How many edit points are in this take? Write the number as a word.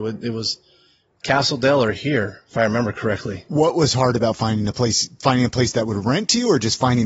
zero